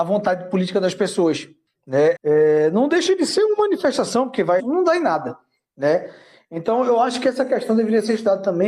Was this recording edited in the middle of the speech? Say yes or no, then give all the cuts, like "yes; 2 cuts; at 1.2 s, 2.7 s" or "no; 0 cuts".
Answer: yes; 2 cuts; at 2.1 s, 4.6 s